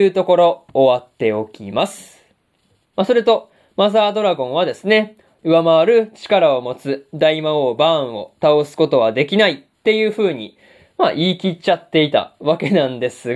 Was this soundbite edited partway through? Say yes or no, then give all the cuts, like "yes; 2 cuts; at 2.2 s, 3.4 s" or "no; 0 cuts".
yes; 2 cuts; at 2.9 s, 5.4 s